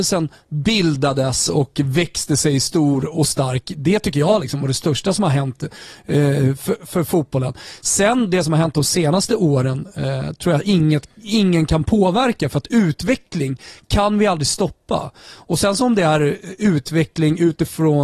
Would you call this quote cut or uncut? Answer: uncut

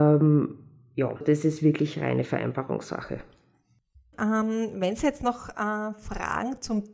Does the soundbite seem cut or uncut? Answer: cut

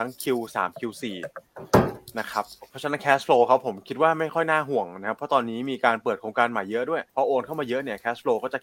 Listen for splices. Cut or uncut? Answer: cut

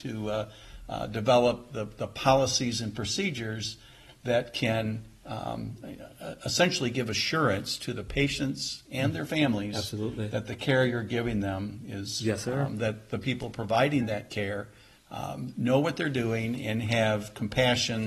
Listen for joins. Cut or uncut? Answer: cut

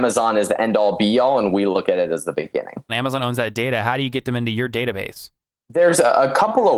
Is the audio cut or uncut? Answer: cut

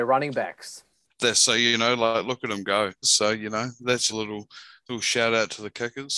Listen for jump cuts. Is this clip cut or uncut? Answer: cut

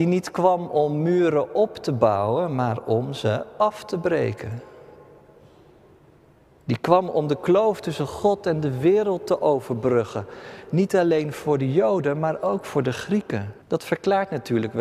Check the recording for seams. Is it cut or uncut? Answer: cut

